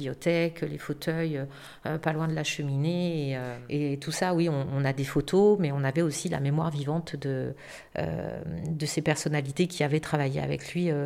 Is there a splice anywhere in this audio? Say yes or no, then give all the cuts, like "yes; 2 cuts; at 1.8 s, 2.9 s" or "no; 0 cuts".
no; 0 cuts